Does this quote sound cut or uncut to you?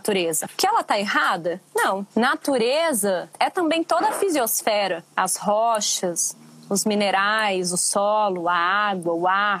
cut